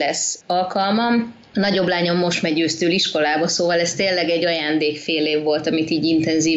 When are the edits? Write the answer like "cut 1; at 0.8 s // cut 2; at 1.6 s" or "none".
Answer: none